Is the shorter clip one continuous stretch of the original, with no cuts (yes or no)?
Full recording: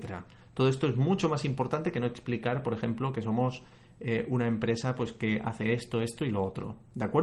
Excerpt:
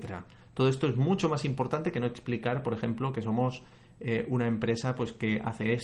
yes